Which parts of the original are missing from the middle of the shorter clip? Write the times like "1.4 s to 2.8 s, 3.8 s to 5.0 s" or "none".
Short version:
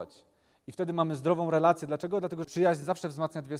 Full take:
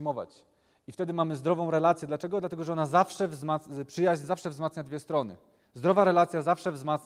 2.6 s to 3.9 s